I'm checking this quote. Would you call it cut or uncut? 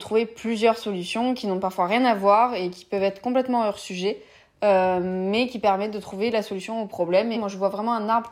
cut